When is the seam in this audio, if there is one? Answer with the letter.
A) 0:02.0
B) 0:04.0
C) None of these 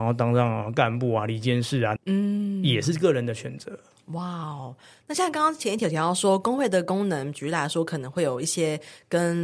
A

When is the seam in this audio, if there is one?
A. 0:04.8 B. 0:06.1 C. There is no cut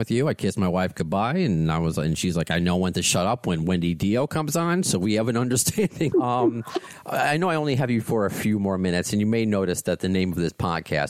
B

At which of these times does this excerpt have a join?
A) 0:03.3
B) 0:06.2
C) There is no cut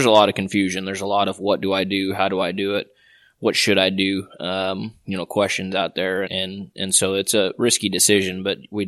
B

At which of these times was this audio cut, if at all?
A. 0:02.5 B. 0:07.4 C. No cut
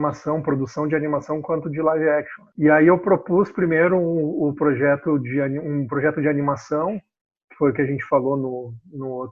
C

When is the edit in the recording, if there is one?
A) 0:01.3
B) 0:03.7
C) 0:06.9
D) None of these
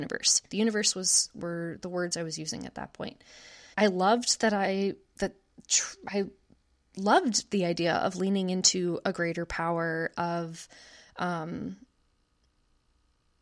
B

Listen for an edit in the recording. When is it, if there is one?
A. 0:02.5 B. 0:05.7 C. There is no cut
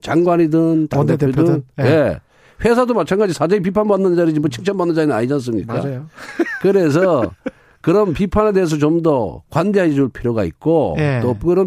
C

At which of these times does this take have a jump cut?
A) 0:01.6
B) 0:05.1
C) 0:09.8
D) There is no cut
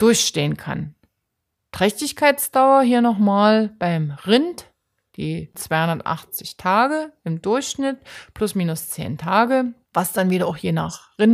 C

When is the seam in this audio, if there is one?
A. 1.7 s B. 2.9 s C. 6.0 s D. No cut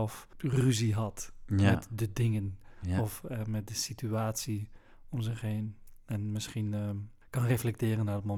D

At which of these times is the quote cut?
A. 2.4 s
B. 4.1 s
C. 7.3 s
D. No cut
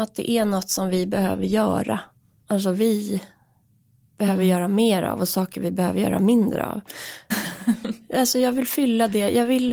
C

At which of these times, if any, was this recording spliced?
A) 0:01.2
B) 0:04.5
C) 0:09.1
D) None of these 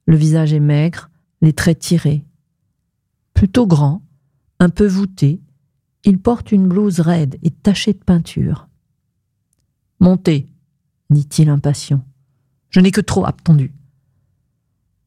A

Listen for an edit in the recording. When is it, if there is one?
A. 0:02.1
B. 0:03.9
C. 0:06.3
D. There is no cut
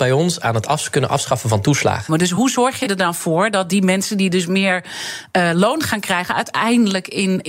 A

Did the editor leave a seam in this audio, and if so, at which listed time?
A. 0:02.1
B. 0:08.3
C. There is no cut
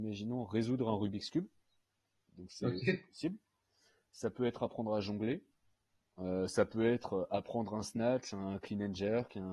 C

